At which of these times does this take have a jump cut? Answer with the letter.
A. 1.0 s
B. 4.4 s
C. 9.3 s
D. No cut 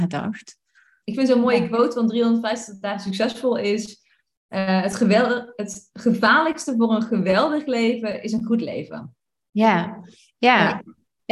A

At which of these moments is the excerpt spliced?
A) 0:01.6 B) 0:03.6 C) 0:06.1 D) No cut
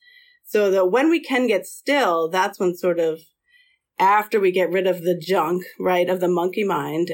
D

